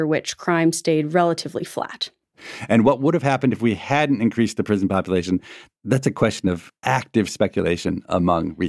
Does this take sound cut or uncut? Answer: uncut